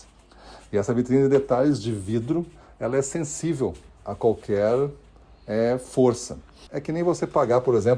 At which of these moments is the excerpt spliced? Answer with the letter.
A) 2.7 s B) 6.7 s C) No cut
B